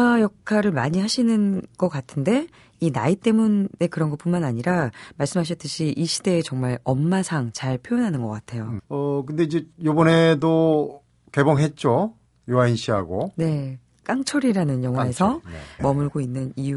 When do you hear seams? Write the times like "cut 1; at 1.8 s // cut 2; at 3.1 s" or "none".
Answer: cut 1; at 8.8 s // cut 2; at 15.8 s